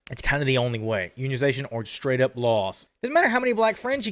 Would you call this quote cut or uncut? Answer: cut